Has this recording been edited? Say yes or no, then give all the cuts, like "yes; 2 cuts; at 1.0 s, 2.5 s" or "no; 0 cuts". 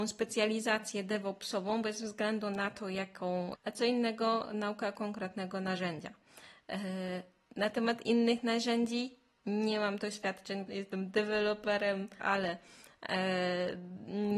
yes; 3 cuts; at 3.5 s, 10.7 s, 12.2 s